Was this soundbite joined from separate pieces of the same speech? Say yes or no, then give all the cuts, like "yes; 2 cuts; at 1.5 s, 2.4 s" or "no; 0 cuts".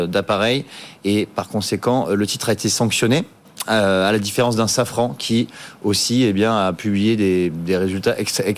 no; 0 cuts